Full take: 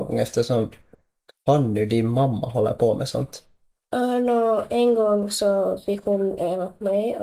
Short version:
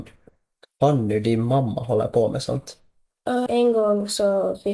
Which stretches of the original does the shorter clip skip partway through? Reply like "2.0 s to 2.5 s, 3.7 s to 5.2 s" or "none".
4.1 s to 4.7 s